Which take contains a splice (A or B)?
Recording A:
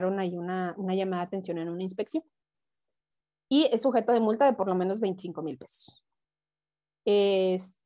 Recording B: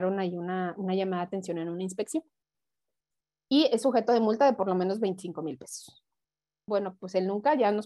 B